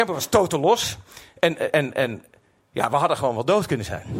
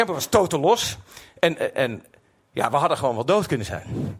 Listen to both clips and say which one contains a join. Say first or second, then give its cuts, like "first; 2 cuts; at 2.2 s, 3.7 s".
second; 1 cut; at 1.7 s